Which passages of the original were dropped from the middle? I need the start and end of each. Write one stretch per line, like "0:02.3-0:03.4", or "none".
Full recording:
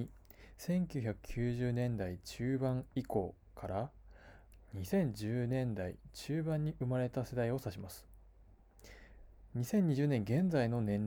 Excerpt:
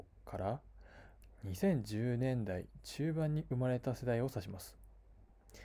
none